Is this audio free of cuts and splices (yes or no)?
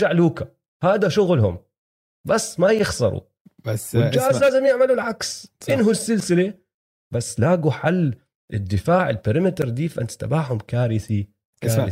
yes